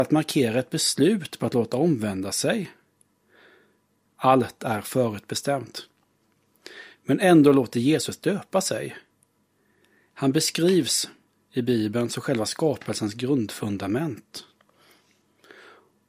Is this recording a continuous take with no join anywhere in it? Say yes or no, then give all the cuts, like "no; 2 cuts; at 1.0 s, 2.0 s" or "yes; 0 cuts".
no; 2 cuts; at 4.1 s, 10.1 s